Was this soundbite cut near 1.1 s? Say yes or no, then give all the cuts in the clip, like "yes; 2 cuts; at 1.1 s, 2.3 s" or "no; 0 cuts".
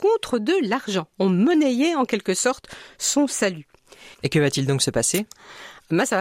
no; 1 cut; at 4.1 s